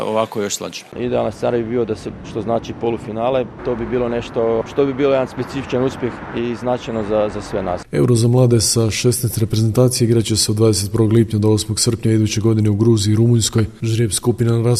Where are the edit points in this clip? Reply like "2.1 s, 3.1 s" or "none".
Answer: 2.2 s

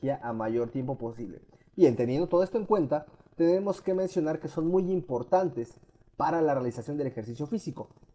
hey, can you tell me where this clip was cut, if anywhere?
none

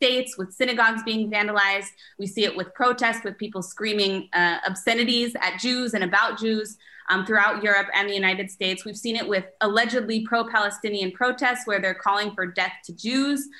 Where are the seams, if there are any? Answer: none

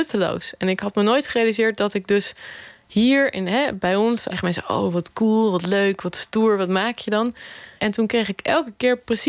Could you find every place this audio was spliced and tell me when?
4.3 s, 7.8 s

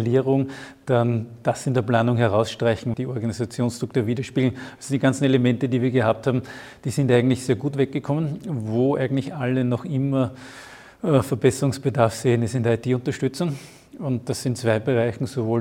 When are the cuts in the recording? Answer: 2.9 s

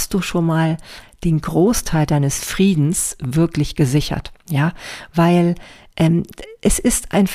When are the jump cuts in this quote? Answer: none

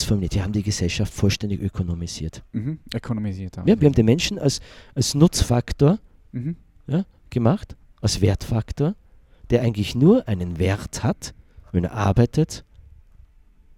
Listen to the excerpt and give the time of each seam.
none

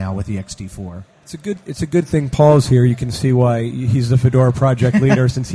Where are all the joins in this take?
none

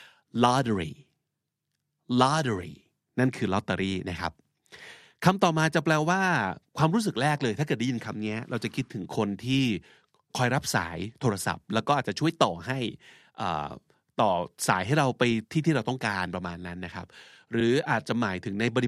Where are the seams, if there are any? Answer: none

